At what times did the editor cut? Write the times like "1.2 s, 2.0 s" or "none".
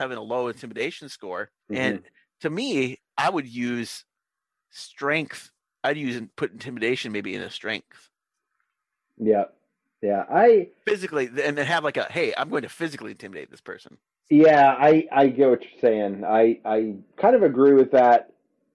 1.6 s, 4.6 s, 17.1 s